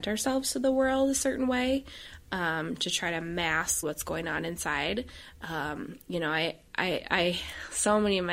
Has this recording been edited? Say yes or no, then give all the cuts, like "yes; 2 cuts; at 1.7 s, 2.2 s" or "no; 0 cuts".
yes; 1 cut; at 3.8 s